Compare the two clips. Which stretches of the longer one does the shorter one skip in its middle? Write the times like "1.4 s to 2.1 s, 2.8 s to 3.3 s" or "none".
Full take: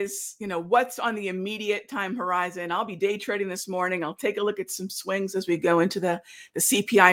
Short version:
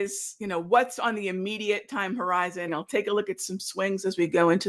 2.7 s to 4.0 s